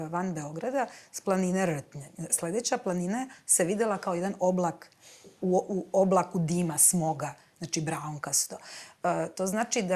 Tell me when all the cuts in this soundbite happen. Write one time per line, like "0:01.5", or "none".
0:02.3